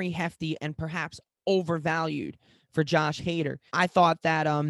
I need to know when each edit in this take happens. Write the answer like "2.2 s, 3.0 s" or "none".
3.7 s